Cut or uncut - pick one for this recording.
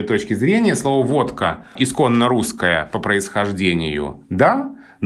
uncut